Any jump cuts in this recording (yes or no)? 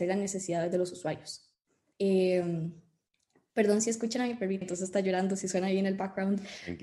yes